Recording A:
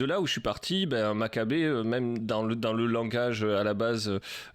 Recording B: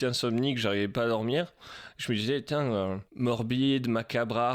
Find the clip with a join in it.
B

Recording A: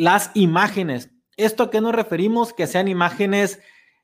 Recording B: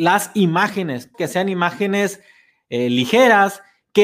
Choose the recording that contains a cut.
B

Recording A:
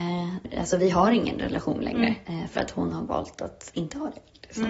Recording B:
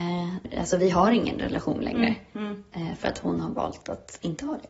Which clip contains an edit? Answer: A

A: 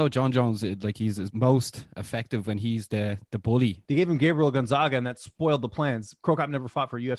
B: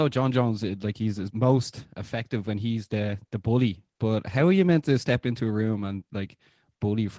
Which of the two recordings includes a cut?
A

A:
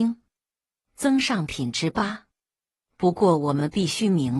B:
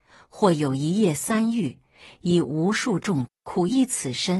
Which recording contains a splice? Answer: B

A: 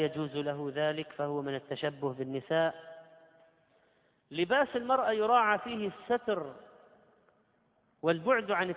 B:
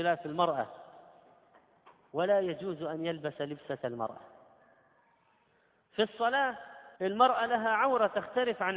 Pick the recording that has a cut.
B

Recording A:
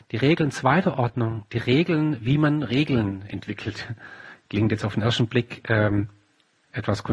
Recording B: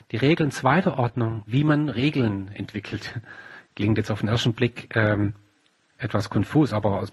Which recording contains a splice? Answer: B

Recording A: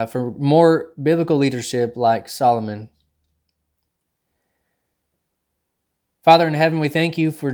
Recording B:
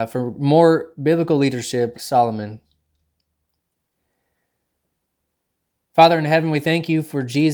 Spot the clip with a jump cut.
B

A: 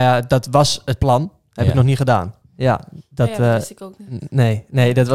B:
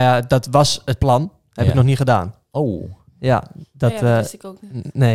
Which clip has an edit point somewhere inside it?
A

